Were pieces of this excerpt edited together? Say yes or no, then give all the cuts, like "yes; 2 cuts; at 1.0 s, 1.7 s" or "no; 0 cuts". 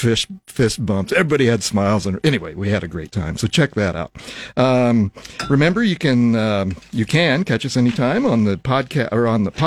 no; 0 cuts